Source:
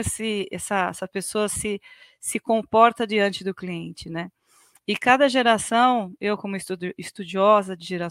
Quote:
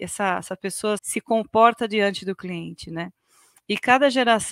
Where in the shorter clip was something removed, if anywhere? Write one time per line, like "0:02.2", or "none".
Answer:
0:01.0